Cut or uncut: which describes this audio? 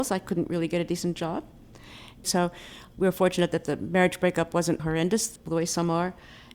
cut